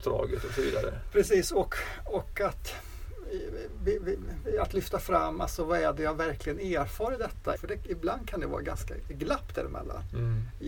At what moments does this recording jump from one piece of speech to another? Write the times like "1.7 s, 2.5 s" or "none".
7.6 s